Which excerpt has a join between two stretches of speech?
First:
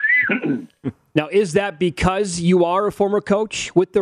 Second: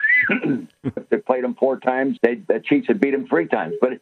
second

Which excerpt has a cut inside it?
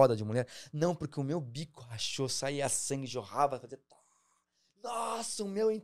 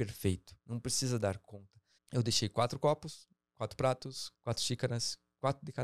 second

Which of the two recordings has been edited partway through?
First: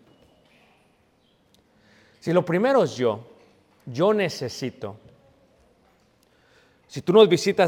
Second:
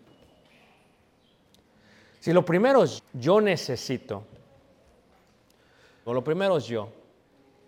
second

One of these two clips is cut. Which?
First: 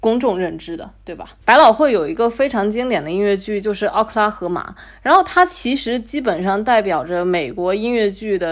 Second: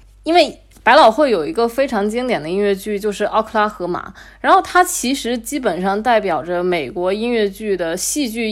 first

